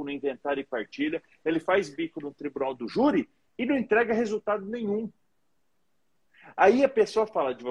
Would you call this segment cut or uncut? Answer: uncut